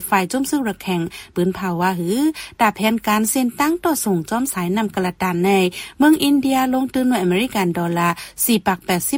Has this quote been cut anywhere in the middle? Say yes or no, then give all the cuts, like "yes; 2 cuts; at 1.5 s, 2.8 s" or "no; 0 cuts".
yes; 1 cut; at 1.3 s